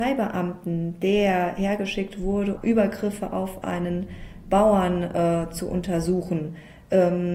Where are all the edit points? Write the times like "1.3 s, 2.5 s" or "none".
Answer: 2.6 s